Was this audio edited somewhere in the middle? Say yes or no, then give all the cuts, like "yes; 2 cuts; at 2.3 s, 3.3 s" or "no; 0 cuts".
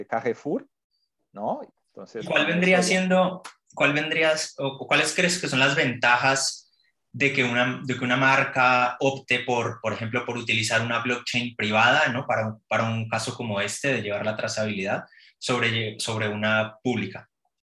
yes; 1 cut; at 1.7 s